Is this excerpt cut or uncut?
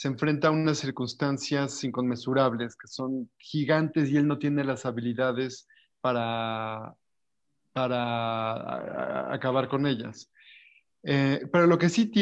uncut